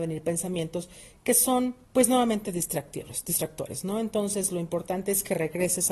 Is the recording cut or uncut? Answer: cut